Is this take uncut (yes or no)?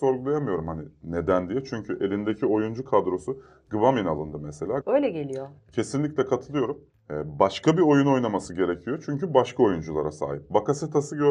no